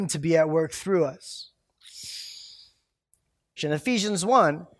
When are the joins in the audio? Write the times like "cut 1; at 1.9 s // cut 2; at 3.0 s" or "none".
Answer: cut 1; at 3.6 s